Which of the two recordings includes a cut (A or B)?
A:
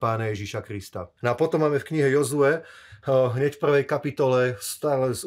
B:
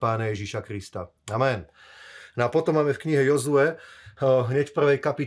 A